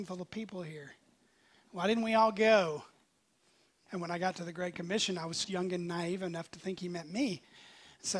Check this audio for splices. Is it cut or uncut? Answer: cut